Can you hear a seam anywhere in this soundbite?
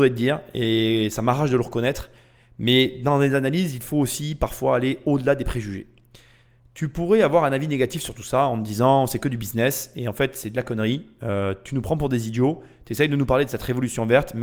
no; 0 cuts

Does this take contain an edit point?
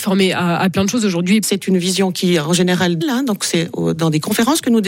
yes; 2 cuts; at 1.4 s, 3.0 s

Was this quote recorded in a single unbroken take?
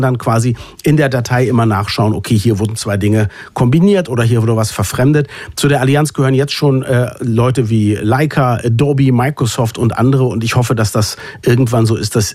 yes; 0 cuts

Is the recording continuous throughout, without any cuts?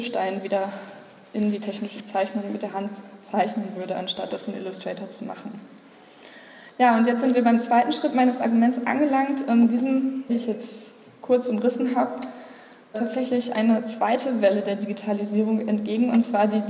no; 2 cuts; at 10.3 s, 12.9 s

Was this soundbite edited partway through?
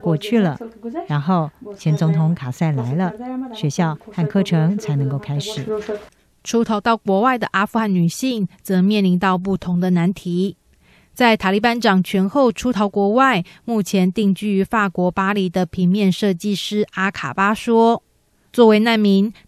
no; 0 cuts

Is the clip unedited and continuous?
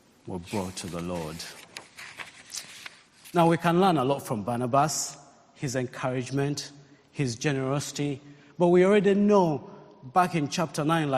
yes; 0 cuts

